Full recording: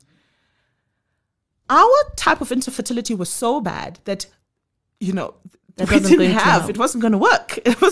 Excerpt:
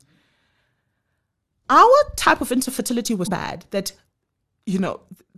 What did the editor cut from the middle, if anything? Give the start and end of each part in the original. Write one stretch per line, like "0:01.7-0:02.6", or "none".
0:03.3-0:03.6